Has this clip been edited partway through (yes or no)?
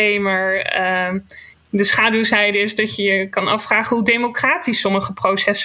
no